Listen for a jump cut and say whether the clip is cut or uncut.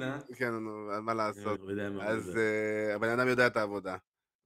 cut